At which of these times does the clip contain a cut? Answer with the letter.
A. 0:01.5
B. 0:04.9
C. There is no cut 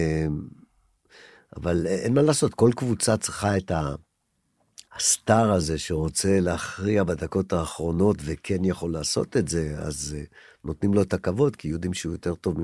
B